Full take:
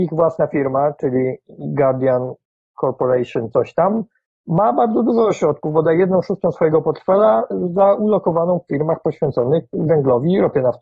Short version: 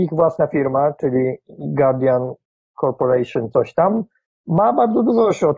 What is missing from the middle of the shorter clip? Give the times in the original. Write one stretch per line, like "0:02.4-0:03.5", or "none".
none